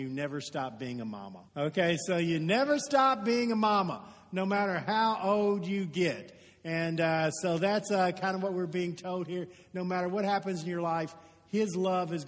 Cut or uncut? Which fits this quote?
cut